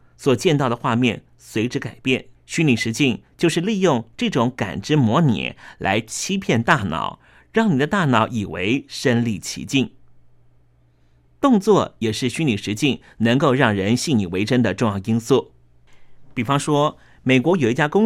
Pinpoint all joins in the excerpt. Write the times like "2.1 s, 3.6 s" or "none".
2.4 s